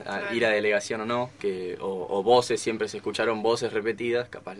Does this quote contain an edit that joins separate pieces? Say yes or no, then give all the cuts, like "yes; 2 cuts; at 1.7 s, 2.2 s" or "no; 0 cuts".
yes; 1 cut; at 1.4 s